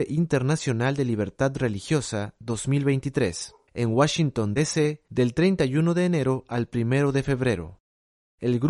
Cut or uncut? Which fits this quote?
uncut